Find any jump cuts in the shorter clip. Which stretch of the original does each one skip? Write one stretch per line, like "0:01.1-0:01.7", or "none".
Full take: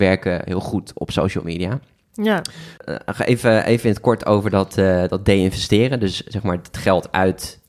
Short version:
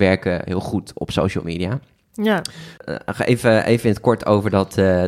none